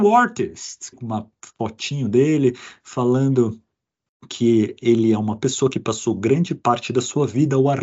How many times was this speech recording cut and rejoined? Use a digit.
1